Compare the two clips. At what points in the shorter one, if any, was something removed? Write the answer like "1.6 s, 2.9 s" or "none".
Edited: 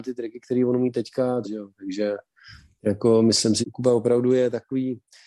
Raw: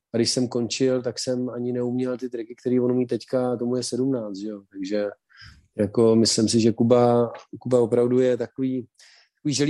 1.4 s, 3.6 s